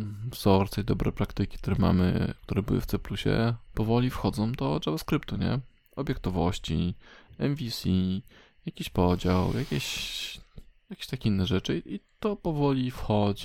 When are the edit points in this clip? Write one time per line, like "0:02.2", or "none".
0:03.7